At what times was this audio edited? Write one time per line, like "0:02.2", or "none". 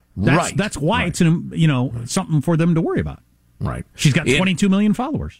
none